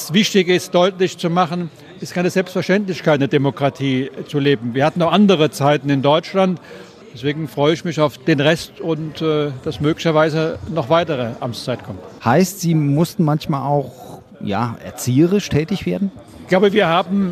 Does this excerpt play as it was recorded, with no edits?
yes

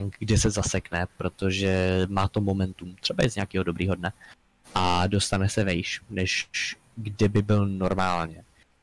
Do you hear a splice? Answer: no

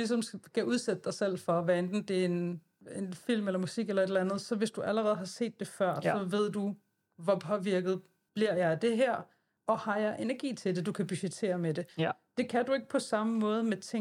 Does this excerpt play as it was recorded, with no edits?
yes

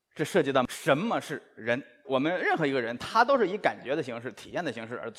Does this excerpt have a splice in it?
no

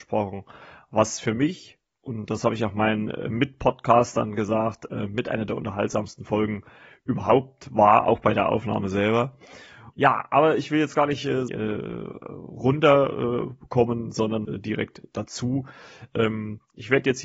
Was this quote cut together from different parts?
yes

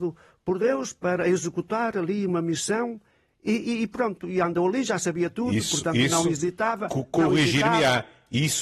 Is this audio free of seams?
yes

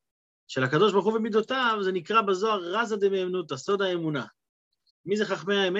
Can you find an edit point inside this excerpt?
yes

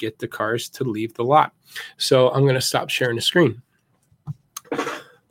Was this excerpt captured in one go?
yes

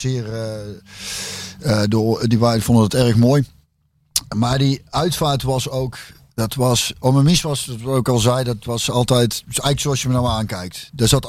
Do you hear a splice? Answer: no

